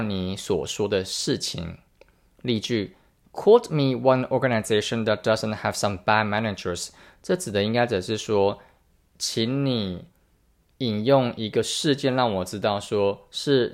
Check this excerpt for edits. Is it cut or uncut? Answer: uncut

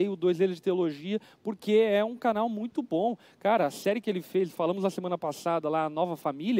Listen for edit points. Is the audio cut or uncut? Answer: uncut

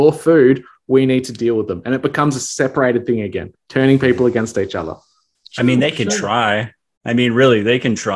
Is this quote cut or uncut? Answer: uncut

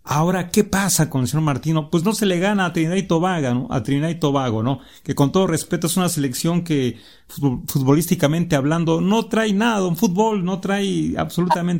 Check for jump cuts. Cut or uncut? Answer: uncut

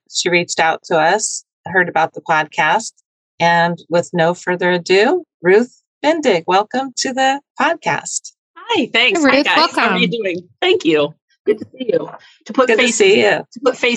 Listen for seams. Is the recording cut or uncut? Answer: uncut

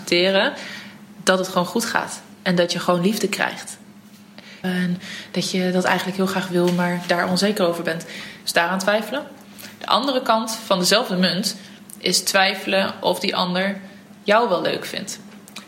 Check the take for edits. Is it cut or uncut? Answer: cut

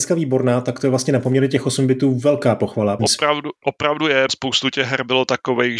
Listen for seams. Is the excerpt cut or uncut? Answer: cut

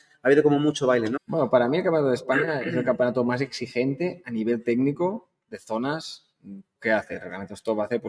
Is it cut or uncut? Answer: cut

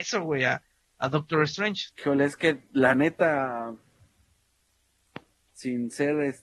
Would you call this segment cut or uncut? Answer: cut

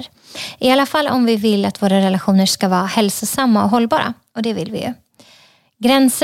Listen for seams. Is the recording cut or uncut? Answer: uncut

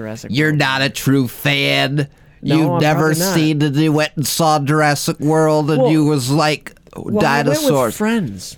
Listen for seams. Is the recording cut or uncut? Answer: uncut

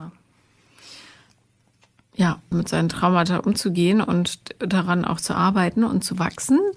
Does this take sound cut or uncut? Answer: cut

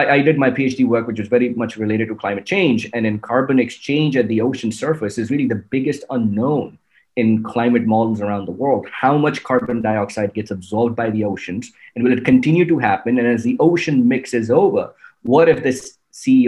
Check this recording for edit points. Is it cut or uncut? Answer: uncut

